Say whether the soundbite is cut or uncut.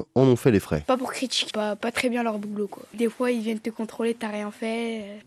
cut